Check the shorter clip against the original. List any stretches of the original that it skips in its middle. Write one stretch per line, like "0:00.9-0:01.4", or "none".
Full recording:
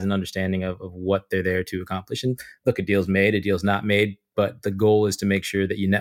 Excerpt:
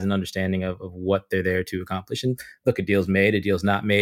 none